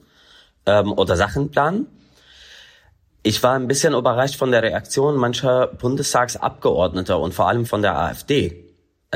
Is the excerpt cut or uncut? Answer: uncut